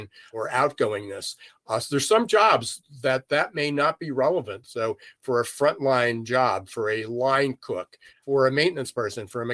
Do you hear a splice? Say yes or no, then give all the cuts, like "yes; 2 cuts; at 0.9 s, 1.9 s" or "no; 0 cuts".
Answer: yes; 2 cuts; at 4.6 s, 8.1 s